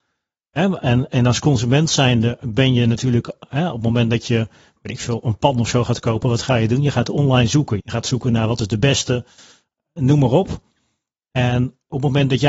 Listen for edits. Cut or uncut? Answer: cut